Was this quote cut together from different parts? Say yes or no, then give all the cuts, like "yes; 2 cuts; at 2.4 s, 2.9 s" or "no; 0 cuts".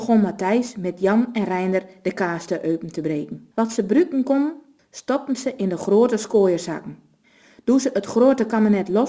yes; 2 cuts; at 3.5 s, 4.8 s